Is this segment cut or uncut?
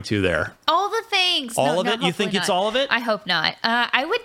uncut